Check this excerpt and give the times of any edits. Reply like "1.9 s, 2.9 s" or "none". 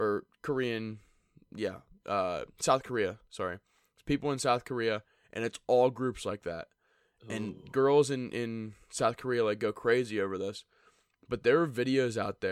none